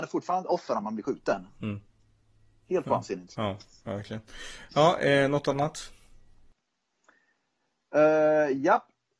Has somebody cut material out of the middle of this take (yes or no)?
no